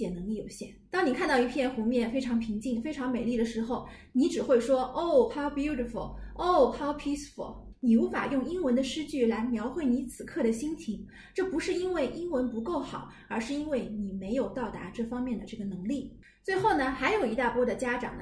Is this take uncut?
yes; 0 cuts

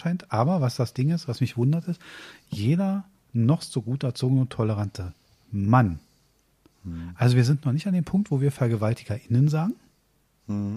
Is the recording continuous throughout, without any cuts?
yes; 0 cuts

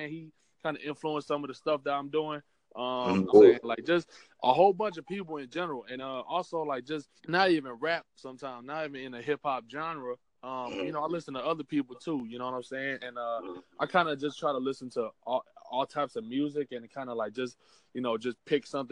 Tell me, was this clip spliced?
yes; 3 cuts; at 3.3 s, 6.0 s, 7.2 s

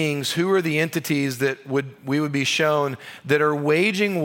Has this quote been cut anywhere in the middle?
no; 0 cuts

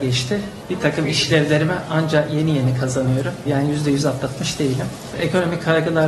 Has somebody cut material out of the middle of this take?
yes; 1 cut; at 3.5 s

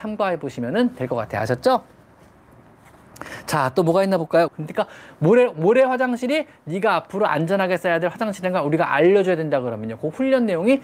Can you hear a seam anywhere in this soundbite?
yes; 1 cut; at 4.5 s

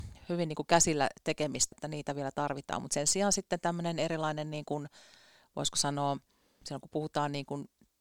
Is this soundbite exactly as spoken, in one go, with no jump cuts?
no; 1 cut; at 1.7 s

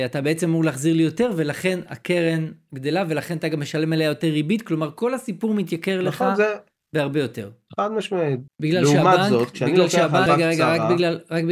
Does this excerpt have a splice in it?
yes; 2 cuts; at 8.5 s, 10.3 s

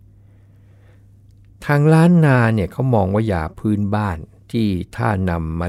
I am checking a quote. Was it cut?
no; 0 cuts

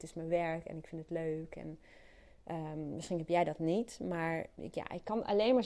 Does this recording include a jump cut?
yes; 1 cut; at 4.5 s

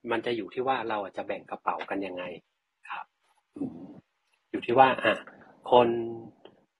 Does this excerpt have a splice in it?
no; 0 cuts

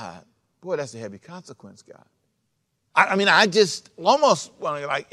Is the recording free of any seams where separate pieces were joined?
yes; 0 cuts

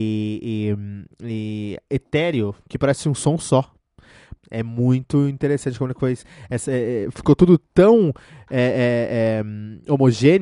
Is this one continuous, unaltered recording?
no; 1 cut; at 4.4 s

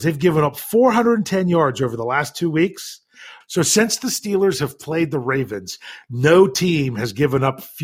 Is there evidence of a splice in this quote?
yes; 1 cut; at 3.4 s

